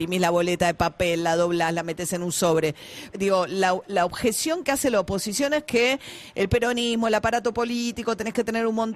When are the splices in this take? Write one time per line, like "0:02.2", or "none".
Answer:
0:03.1